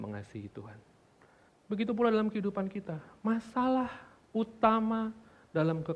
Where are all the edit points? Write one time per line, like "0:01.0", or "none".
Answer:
0:01.5